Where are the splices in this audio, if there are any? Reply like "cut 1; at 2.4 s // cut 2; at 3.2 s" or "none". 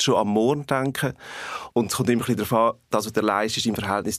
cut 1; at 1.7 s